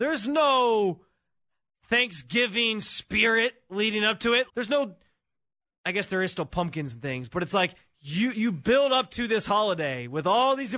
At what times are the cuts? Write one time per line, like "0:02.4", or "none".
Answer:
0:04.5